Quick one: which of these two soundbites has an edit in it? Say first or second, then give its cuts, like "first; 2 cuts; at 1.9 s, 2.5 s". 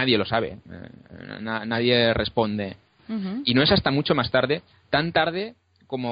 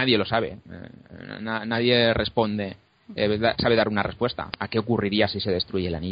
first; 1 cut; at 3.0 s